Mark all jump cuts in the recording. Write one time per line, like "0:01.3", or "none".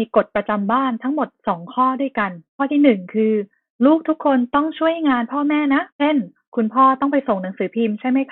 0:02.5
0:05.9